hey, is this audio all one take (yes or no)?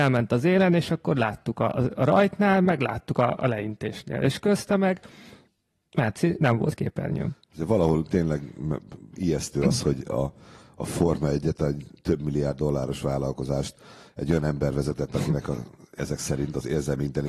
yes